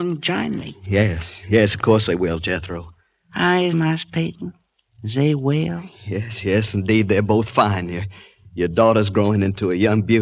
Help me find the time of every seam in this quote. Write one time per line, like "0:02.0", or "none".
0:03.7